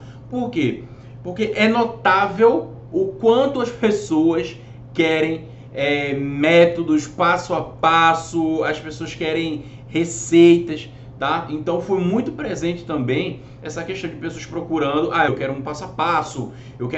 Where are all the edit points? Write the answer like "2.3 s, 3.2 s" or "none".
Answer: 15.3 s

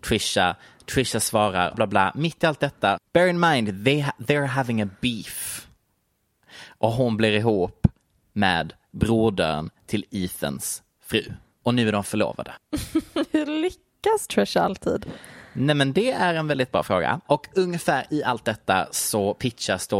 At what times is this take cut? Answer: 1.7 s

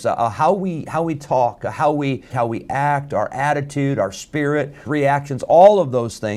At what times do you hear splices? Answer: 2.3 s, 4.9 s

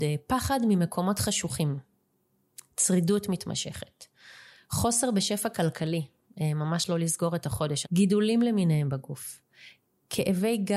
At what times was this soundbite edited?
7.8 s

